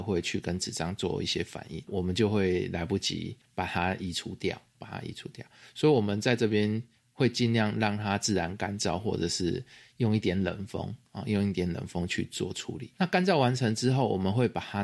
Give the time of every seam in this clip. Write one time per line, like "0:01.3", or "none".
none